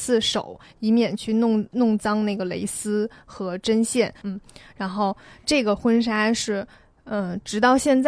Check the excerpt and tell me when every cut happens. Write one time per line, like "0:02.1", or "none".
0:04.2